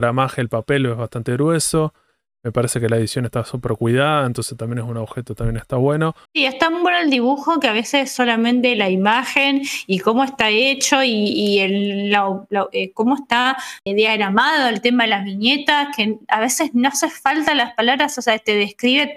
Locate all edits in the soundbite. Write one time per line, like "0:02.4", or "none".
0:06.3
0:13.9